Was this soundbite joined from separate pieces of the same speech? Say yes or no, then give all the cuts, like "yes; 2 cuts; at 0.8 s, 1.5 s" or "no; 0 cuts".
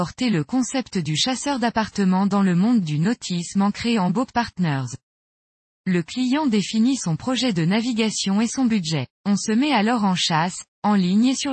yes; 2 cuts; at 5.7 s, 9.2 s